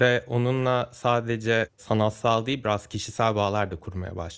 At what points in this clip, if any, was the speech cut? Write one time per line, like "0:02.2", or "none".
none